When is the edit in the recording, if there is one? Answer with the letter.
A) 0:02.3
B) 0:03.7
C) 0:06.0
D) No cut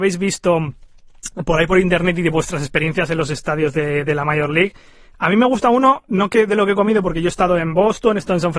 D